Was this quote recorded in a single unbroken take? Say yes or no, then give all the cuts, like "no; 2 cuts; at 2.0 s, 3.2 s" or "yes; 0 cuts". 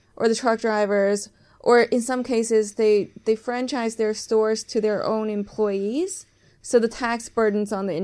yes; 0 cuts